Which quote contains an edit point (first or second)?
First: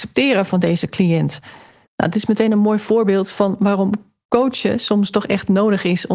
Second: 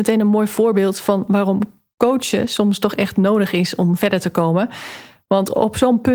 first